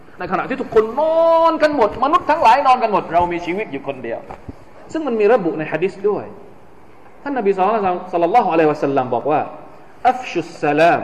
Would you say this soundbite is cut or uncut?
uncut